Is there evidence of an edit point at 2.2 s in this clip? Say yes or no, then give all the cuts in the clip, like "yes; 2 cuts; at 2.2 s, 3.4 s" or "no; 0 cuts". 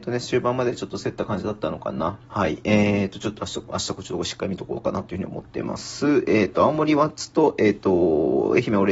yes; 1 cut; at 2.2 s